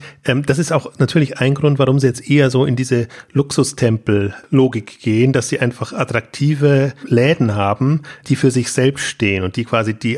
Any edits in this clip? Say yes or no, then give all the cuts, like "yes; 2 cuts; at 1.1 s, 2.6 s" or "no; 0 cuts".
yes; 2 cuts; at 7.0 s, 8.2 s